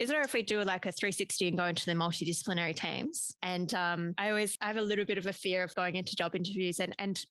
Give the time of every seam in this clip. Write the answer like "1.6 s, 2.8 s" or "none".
3.4 s, 4.6 s, 5.7 s